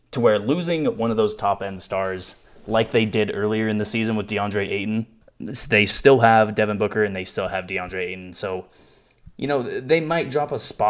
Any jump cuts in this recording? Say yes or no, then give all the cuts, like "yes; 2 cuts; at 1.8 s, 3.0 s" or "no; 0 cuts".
yes; 1 cut; at 5.2 s